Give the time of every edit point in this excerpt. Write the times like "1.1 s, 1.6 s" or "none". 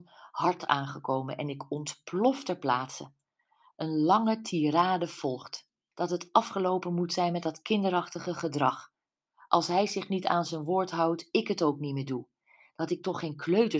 5.9 s